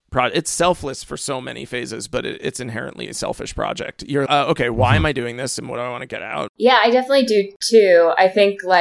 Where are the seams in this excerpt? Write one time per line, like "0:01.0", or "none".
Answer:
0:04.3
0:06.5